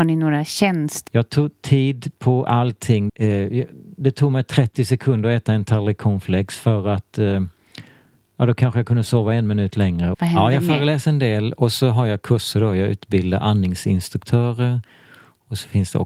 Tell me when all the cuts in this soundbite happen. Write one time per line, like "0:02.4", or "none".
0:01.1
0:03.1
0:10.1